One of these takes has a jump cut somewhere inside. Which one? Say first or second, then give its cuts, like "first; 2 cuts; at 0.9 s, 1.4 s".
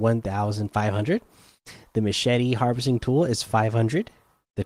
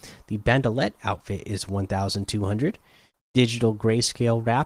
second; 1 cut; at 3.1 s